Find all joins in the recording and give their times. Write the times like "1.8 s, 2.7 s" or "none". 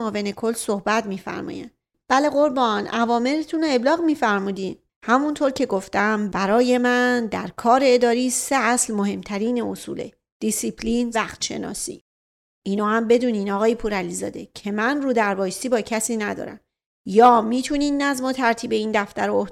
11.1 s

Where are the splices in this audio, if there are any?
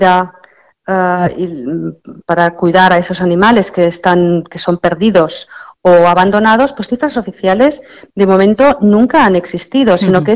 none

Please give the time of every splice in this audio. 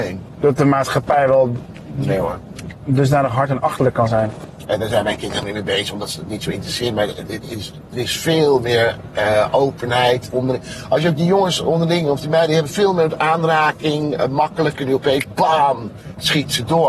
4.6 s, 14.8 s

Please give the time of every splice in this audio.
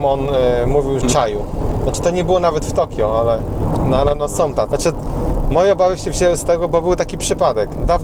1.0 s, 4.7 s

